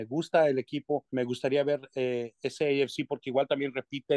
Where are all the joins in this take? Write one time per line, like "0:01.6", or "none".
0:01.1